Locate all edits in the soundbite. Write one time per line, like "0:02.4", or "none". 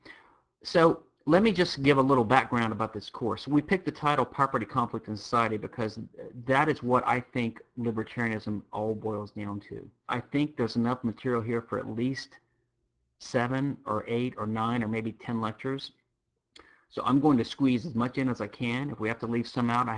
0:10.0